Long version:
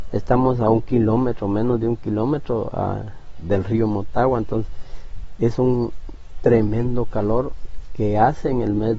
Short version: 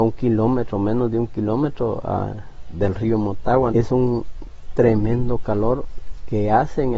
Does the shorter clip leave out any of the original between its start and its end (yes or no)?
yes